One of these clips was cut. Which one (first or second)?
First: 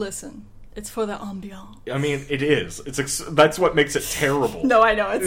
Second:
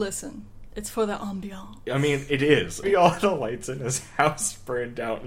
second